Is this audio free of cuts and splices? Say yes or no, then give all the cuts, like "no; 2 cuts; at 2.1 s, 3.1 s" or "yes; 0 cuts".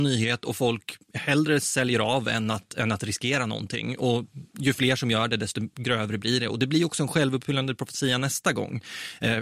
yes; 0 cuts